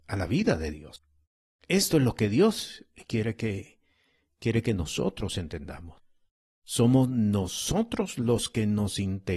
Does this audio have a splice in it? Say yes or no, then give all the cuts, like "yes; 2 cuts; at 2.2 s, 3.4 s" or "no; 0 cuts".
no; 0 cuts